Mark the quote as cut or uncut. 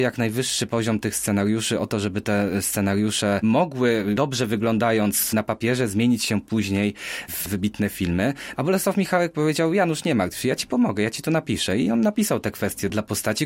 cut